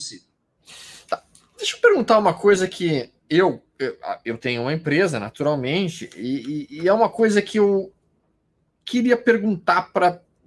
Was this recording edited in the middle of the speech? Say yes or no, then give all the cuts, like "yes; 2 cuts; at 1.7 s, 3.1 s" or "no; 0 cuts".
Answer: no; 0 cuts